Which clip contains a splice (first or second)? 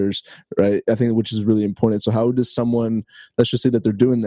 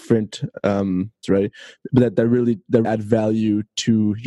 second